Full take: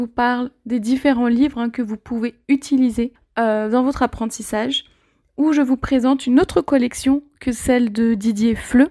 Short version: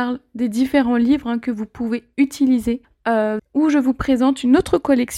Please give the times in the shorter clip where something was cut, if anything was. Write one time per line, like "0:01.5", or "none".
0:03.4